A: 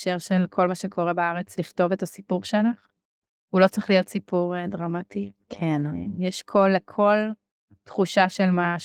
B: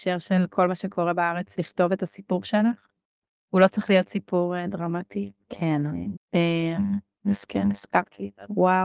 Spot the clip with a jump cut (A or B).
B